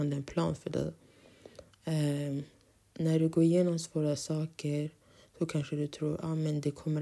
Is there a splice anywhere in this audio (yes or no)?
no